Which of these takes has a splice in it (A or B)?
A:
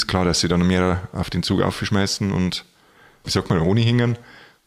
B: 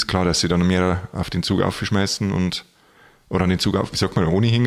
A